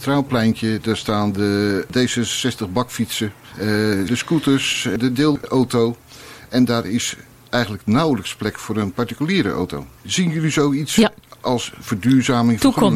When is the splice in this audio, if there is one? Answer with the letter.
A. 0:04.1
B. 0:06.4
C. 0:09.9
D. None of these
A